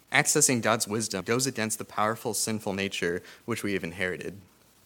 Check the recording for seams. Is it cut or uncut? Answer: cut